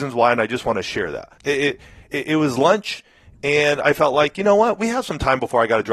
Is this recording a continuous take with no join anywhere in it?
no; 1 cut; at 1.4 s

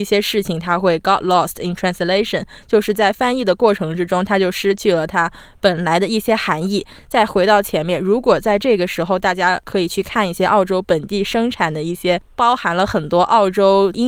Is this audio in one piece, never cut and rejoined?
yes; 0 cuts

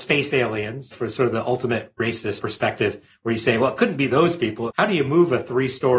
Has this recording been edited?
yes; 1 cut; at 4.7 s

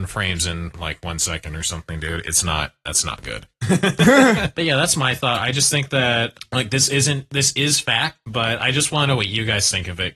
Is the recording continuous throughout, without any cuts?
yes; 0 cuts

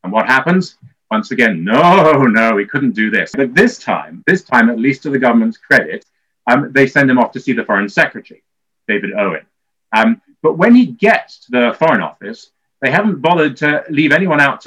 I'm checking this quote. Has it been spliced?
no; 0 cuts

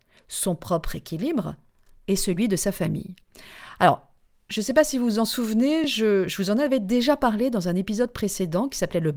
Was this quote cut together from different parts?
no; 0 cuts

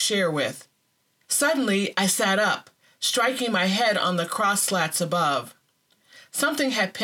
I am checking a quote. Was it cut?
yes; 1 cut; at 1.2 s

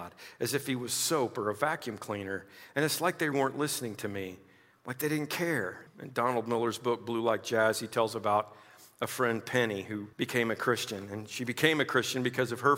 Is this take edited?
yes; 3 cuts; at 3.3 s, 5.9 s, 10.1 s

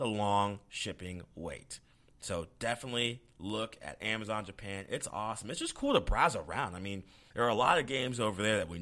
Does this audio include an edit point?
yes; 1 cut; at 7.3 s

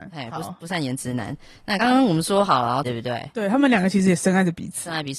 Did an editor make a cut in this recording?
yes; 2 cuts; at 1.8 s, 2.8 s

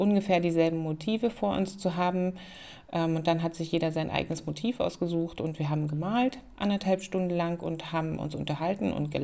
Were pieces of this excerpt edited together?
no; 0 cuts

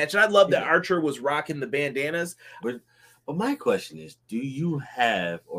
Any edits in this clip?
yes; 1 cut; at 2.6 s

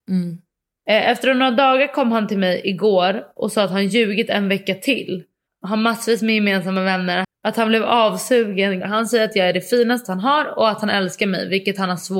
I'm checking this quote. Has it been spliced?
yes; 3 cuts; at 5.5 s, 7.2 s, 8.8 s

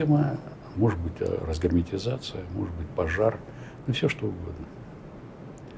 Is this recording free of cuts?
yes; 0 cuts

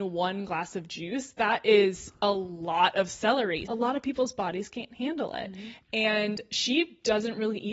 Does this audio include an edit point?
yes; 1 cut; at 3.7 s

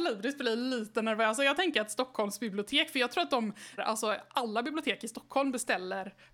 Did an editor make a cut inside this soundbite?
yes; 1 cut; at 3.8 s

